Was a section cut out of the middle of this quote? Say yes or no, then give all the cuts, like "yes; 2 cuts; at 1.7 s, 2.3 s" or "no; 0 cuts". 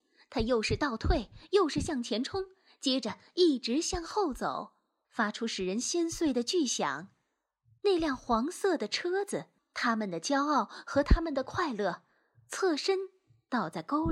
yes; 1 cut; at 5.0 s